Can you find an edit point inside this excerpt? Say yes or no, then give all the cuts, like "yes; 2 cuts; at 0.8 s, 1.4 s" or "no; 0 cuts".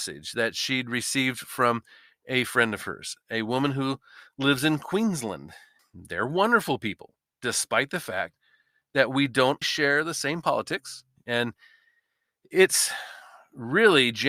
yes; 3 cuts; at 5.8 s, 9.6 s, 11.2 s